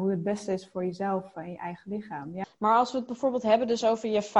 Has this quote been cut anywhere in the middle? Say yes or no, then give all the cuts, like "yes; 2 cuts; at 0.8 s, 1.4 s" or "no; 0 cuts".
yes; 1 cut; at 2.4 s